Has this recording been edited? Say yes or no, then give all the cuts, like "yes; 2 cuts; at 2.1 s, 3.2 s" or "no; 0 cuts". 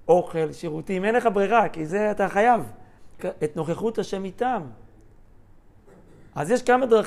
yes; 1 cut; at 3.2 s